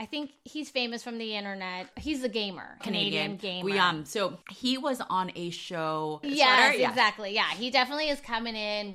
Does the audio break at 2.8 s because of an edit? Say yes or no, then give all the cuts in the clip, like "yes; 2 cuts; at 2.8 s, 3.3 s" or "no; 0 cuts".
yes; 2 cuts; at 2.8 s, 6.2 s